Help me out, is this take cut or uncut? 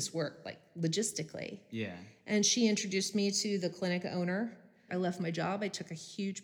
cut